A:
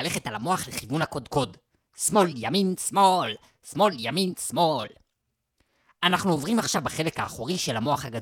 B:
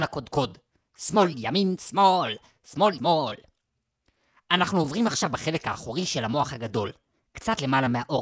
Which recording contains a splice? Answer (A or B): B